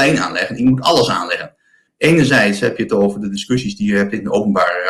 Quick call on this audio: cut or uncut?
cut